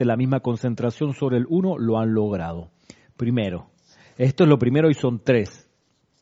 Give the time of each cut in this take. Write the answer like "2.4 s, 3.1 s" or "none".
none